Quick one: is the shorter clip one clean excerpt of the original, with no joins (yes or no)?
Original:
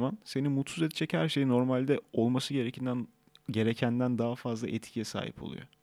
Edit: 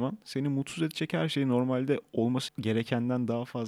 no